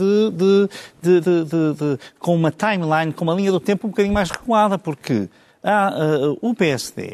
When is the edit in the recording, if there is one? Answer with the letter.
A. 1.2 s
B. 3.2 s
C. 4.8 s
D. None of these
A